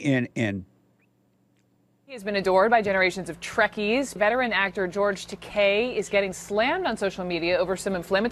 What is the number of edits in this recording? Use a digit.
1